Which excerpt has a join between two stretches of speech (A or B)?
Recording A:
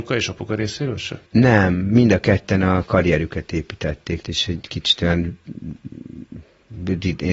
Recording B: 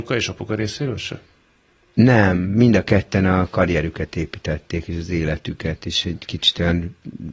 A